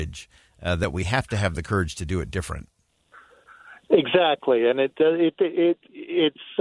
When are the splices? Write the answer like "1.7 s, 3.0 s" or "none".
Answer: none